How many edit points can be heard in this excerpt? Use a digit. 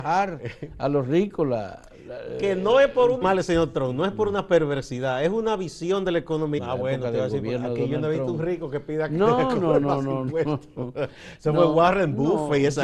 2